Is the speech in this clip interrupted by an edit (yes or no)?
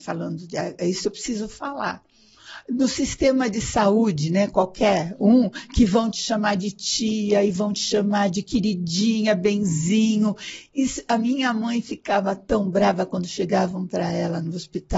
no